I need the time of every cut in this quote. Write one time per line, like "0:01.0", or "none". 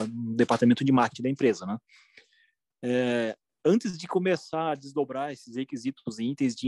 none